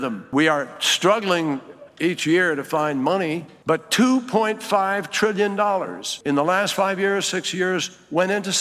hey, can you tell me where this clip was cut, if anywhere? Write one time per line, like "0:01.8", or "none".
none